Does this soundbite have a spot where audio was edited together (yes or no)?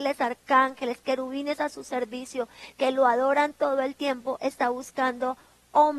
no